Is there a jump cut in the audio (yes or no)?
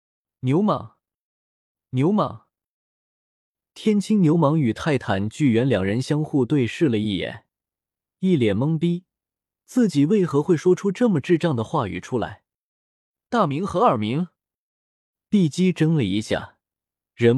no